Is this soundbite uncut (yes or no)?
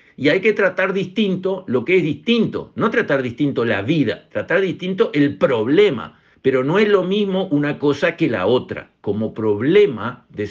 no